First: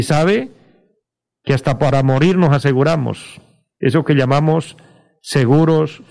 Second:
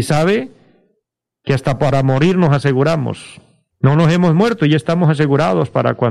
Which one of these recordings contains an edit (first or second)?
second